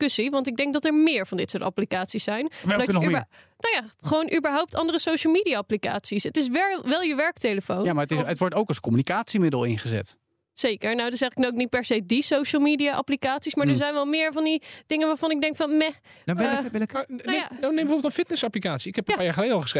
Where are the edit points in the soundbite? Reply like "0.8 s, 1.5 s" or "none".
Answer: none